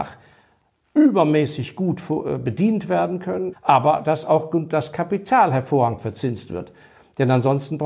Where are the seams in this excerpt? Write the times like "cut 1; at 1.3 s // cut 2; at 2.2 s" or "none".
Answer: cut 1; at 3.5 s